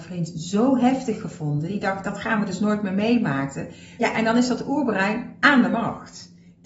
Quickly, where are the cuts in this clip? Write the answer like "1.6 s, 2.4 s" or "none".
4.0 s